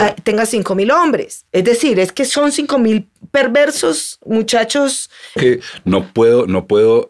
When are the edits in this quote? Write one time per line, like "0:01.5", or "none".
0:01.5
0:05.4